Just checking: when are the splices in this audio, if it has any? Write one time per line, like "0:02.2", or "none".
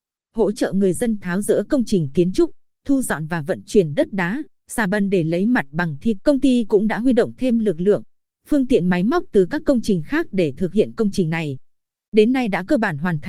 0:06.2